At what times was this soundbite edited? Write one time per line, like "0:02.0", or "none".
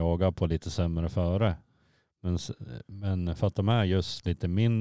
none